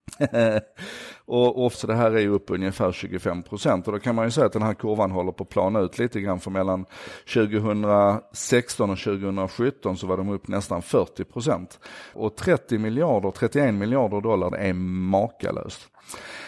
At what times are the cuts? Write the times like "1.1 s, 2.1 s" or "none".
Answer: 1.7 s, 12.1 s, 14.5 s